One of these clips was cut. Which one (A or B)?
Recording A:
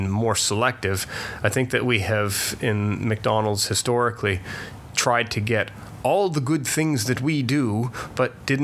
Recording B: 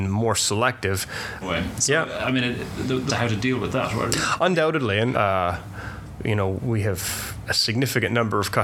B